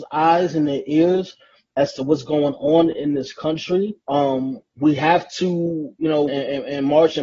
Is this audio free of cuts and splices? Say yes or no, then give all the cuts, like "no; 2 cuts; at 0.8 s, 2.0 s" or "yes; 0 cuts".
no; 2 cuts; at 4.0 s, 6.3 s